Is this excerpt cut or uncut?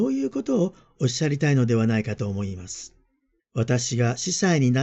cut